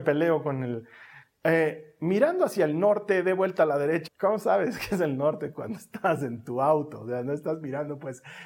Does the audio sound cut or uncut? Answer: cut